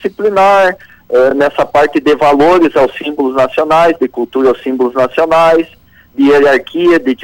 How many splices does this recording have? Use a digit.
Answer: 0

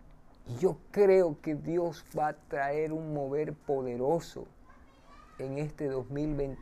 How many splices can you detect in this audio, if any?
0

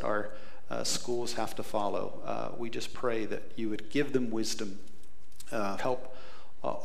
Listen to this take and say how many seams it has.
1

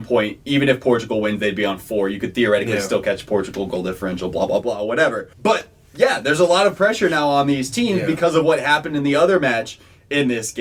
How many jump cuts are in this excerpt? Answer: 1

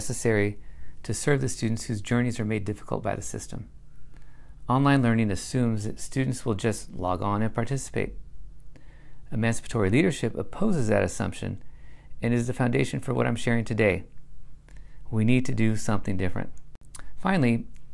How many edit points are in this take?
0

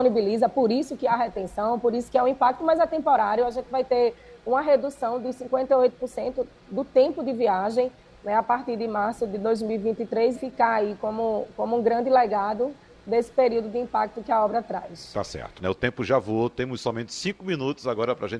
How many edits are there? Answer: 1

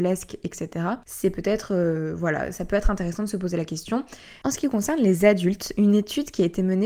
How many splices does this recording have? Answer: 1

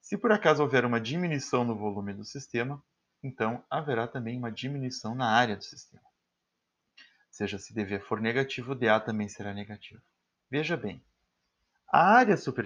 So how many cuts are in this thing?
1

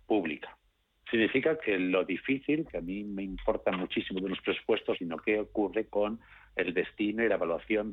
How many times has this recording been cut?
3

